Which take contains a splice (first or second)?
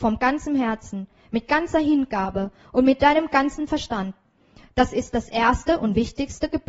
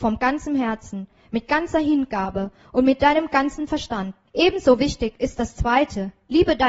second